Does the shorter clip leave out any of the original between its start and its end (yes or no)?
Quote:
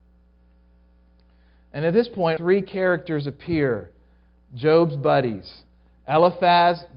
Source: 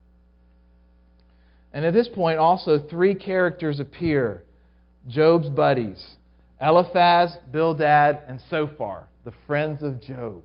yes